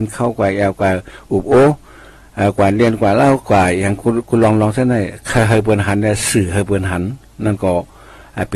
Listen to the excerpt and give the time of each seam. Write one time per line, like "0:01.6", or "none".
none